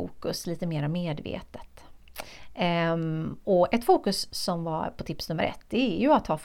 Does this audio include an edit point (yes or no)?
no